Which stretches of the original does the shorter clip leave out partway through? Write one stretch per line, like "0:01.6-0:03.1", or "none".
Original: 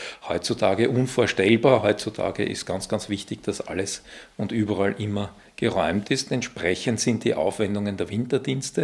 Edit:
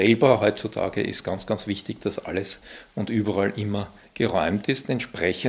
none